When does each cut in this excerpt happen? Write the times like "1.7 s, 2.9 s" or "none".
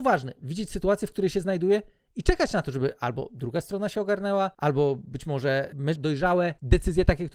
6.0 s